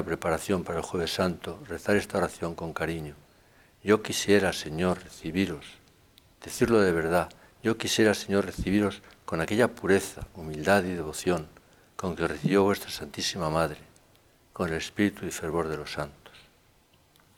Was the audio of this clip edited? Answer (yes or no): no